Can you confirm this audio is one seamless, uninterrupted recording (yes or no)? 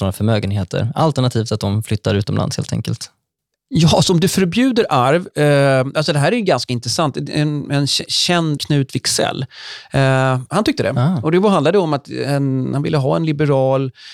no